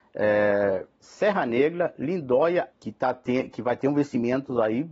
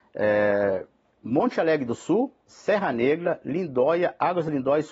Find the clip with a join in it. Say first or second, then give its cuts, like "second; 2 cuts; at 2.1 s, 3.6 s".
first; 2 cuts; at 0.9 s, 2.7 s